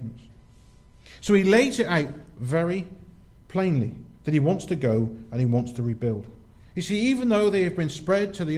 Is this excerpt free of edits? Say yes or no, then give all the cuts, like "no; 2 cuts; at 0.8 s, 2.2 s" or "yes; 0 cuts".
no; 1 cut; at 6.6 s